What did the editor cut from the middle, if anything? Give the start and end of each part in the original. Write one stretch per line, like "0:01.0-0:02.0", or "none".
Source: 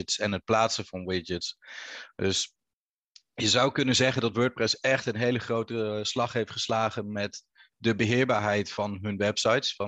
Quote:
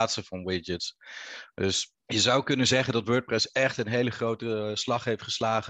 0:02.6-0:03.3